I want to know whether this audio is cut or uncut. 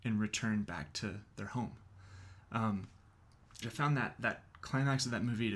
cut